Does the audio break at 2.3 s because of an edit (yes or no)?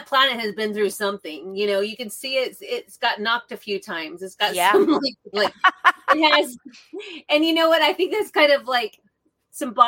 no